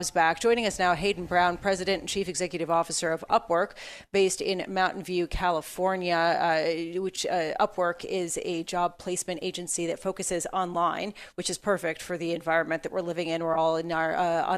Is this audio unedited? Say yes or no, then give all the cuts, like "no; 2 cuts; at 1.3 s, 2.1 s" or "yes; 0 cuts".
yes; 0 cuts